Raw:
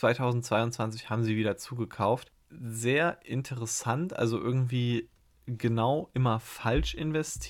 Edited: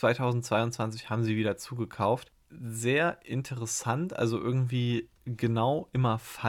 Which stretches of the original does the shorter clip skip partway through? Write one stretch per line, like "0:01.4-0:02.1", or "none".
0:05.2-0:05.4